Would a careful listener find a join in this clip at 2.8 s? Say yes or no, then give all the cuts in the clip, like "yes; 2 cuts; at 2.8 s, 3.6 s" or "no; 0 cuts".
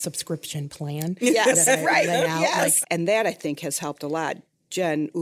yes; 1 cut; at 2.8 s